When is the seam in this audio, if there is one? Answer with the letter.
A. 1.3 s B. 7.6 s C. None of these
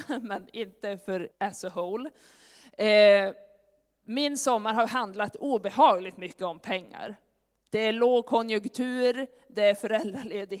A